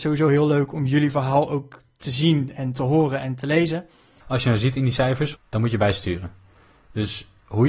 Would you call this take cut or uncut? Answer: cut